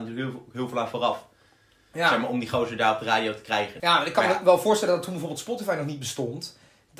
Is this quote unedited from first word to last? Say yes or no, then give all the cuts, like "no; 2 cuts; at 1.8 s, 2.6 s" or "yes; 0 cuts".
no; 1 cut; at 3.8 s